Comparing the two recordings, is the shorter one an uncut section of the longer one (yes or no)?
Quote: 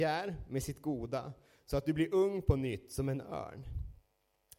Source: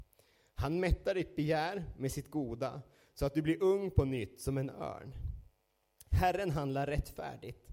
yes